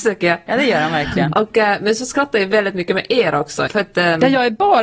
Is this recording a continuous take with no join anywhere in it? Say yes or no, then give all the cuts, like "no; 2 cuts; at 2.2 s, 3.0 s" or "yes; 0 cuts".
no; 1 cut; at 3.7 s